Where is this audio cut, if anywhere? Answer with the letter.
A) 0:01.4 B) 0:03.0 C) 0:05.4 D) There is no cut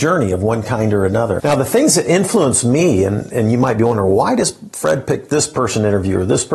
A